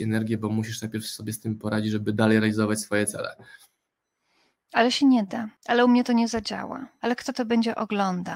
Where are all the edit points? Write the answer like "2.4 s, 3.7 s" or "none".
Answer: 5.6 s, 7.0 s